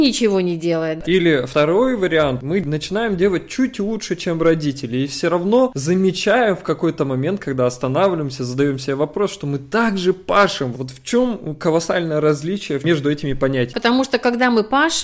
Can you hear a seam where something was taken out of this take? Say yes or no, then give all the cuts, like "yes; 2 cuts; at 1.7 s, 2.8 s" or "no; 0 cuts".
yes; 3 cuts; at 1.0 s, 10.7 s, 13.7 s